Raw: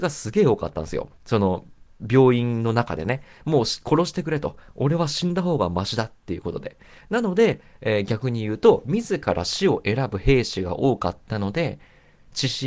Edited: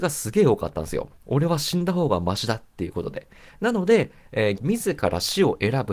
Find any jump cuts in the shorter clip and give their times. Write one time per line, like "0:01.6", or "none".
0:01.2
0:04.6